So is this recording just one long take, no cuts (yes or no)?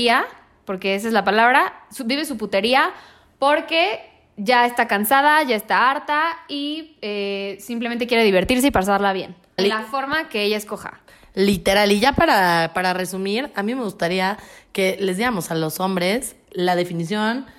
no